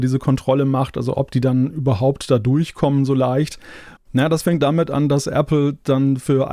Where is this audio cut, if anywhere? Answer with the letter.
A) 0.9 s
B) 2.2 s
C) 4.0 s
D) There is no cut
C